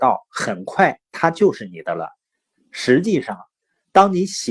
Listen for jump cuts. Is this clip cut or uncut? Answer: uncut